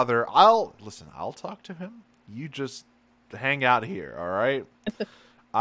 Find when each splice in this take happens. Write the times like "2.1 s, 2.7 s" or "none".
none